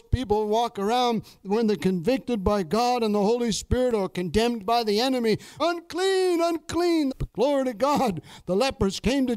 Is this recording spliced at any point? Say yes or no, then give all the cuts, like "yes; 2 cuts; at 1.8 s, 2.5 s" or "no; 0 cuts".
yes; 2 cuts; at 5.6 s, 7.1 s